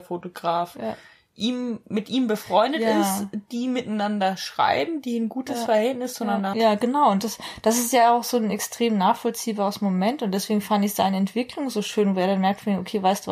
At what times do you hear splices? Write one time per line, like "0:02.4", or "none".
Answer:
0:06.5